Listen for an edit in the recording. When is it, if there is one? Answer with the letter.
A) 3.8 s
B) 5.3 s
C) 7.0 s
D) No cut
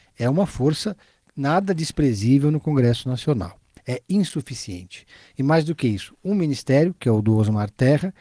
A